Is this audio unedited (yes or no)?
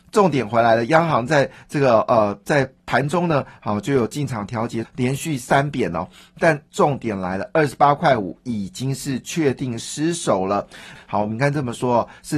no